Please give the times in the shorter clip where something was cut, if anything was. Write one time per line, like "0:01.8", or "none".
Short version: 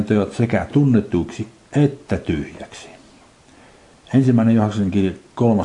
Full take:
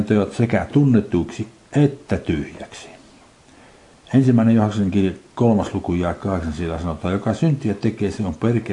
none